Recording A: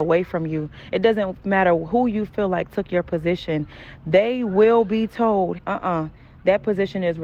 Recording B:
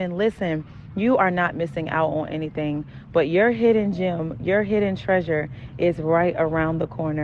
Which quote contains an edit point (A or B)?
A